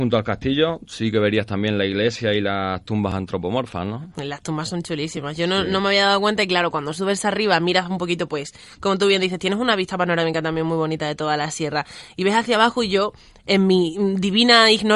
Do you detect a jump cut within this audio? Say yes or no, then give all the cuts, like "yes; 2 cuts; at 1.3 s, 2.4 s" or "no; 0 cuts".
no; 0 cuts